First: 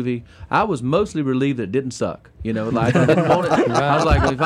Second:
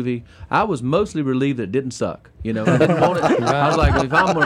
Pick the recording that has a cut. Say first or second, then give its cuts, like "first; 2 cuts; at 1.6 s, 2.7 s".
second; 1 cut; at 2.6 s